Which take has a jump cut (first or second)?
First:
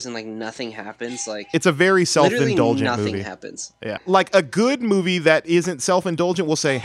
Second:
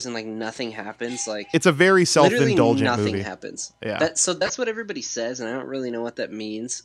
first